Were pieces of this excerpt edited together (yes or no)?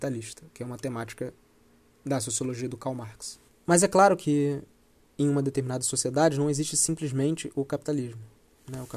yes